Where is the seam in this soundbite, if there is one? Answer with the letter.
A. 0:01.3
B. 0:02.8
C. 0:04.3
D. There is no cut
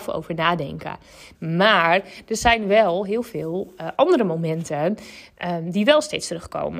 A